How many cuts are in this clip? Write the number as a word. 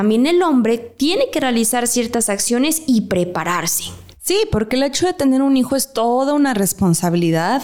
one